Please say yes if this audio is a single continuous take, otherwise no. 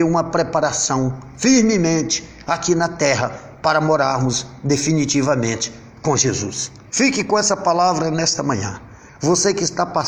no